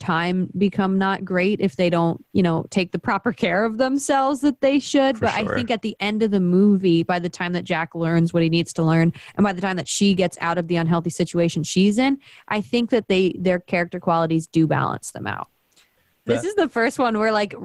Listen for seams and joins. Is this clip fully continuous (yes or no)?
no